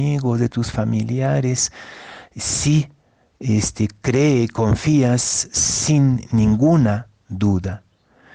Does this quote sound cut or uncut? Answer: uncut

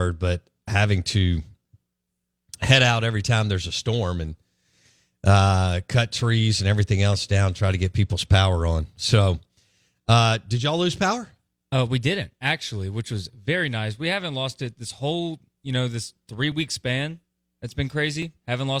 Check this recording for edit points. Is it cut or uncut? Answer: uncut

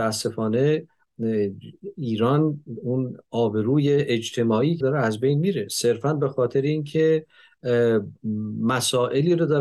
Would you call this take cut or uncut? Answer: cut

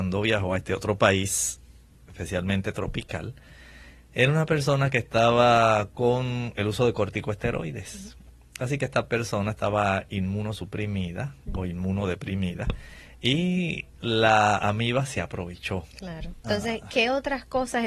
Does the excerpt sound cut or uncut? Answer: cut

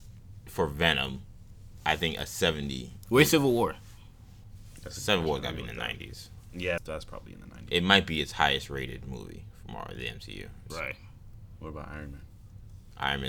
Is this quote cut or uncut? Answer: cut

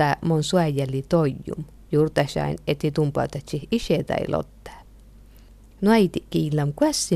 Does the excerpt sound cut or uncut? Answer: uncut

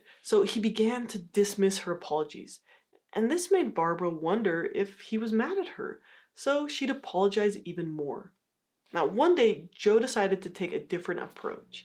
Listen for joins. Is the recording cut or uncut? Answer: uncut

